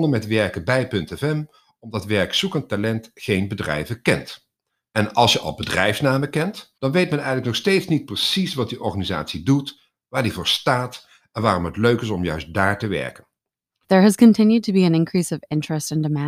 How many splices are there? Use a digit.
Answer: 3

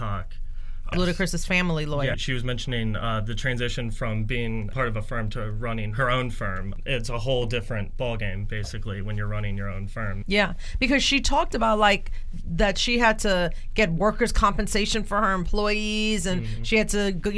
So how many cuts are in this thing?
3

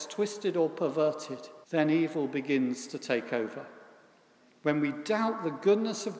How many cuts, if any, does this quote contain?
1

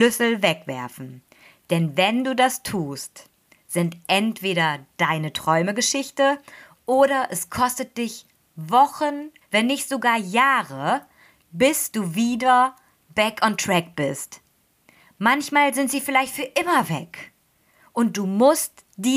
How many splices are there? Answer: 1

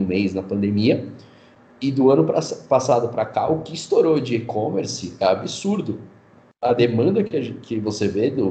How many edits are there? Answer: 0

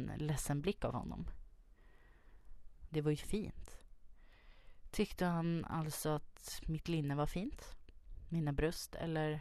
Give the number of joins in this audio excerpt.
1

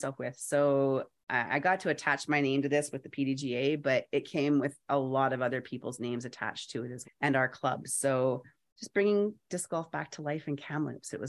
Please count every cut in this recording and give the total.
1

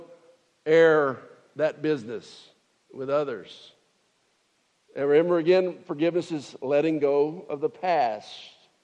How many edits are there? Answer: 0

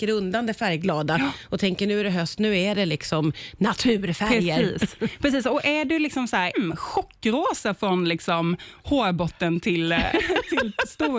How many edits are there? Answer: 1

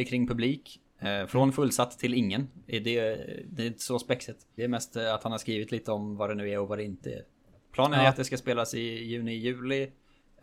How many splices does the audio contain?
1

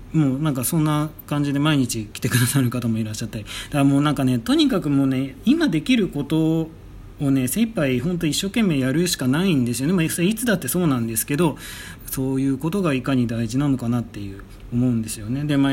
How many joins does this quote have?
2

